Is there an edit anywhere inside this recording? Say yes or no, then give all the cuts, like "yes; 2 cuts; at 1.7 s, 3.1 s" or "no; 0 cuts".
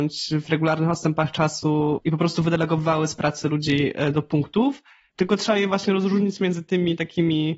yes; 1 cut; at 5.1 s